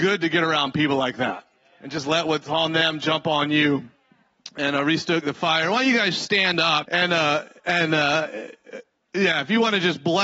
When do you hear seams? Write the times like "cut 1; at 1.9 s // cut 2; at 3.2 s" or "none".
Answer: cut 1; at 6.8 s